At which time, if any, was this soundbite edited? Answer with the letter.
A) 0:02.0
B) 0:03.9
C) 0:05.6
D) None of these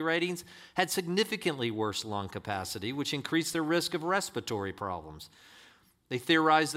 D